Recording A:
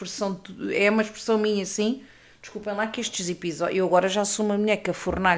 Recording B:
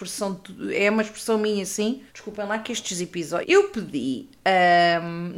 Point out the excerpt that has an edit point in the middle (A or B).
B